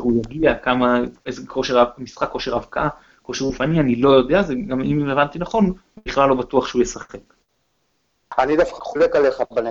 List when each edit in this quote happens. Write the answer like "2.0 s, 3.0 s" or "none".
8.8 s